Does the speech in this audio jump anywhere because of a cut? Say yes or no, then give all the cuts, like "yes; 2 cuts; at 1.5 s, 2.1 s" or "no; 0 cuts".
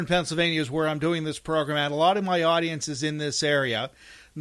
no; 0 cuts